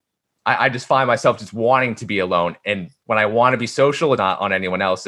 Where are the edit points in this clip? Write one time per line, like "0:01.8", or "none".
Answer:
0:04.2